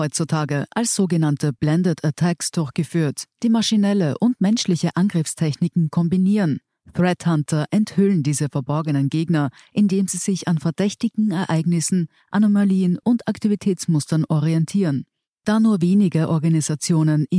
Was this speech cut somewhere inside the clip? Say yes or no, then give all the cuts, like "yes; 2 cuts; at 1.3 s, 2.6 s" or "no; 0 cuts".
no; 0 cuts